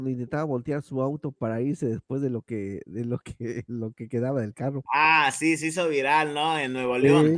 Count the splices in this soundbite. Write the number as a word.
zero